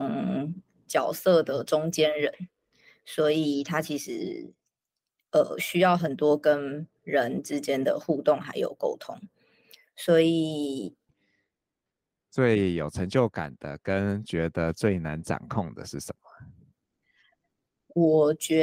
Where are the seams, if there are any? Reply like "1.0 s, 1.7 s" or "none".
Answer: 11.1 s